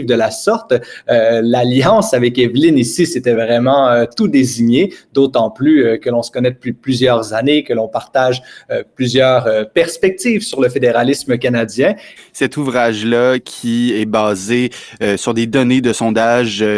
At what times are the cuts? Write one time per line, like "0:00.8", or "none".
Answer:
0:12.2